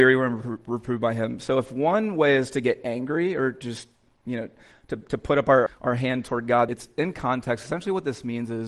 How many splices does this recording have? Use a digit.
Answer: 2